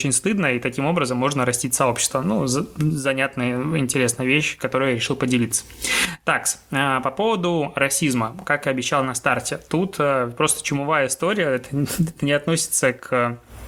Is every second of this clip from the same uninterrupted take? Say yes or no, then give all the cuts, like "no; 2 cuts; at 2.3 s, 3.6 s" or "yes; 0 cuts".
yes; 0 cuts